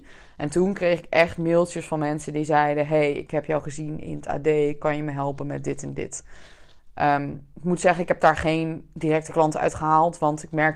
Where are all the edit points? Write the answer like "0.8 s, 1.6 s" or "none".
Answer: none